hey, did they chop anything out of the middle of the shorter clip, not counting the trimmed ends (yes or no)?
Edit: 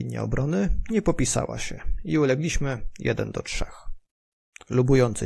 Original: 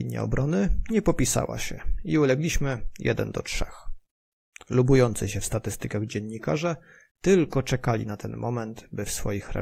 no